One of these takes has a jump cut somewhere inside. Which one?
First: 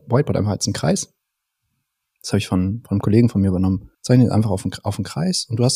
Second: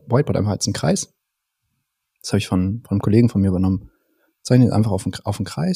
first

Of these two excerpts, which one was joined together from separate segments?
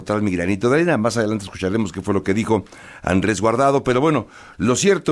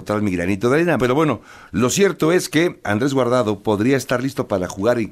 second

